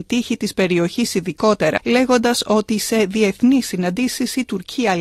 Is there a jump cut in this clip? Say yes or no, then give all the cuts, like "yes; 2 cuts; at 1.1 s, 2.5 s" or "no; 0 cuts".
yes; 1 cut; at 1.8 s